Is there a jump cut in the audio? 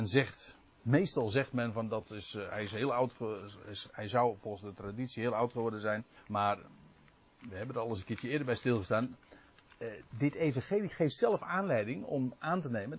yes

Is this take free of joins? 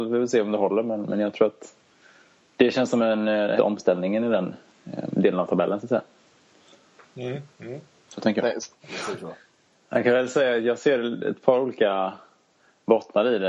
no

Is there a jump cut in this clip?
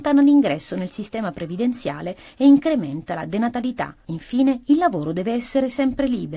no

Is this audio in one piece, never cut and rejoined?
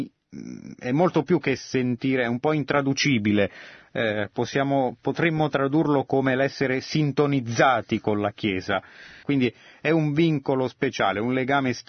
no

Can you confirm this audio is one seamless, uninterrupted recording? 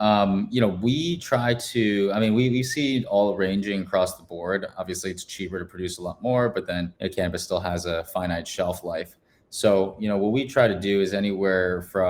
no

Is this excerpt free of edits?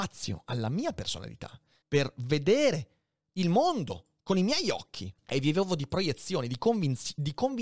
no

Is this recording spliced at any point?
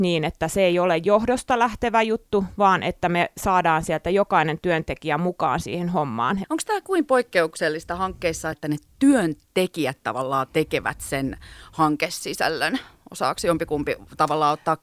yes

